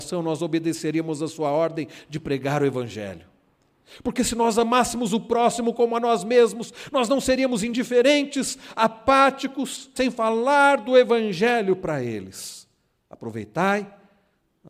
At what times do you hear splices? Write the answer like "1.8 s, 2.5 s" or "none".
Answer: 10.0 s